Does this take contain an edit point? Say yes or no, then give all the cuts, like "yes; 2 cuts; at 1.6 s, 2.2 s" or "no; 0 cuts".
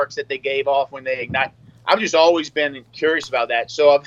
no; 0 cuts